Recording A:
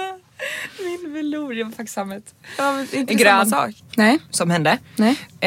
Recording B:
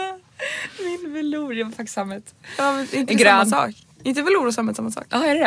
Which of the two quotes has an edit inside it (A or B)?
A